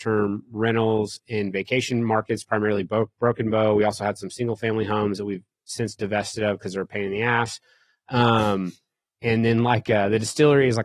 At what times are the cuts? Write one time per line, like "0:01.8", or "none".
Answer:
none